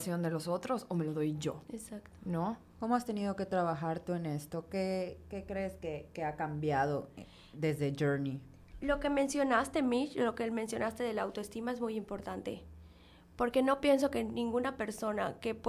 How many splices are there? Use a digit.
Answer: 0